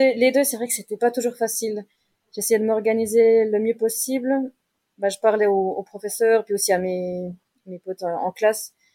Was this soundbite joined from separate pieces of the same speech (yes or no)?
no